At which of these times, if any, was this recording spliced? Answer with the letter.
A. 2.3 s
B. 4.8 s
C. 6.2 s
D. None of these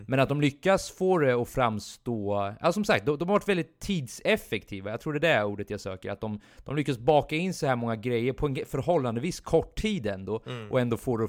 D